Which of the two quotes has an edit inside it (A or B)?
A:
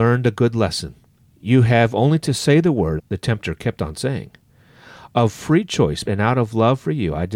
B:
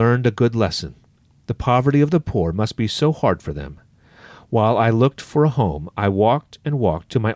A